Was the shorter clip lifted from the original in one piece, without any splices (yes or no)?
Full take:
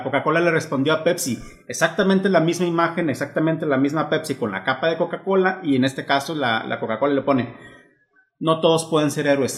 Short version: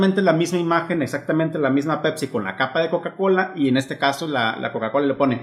yes